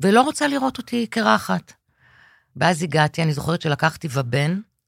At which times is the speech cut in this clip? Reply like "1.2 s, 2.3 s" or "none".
none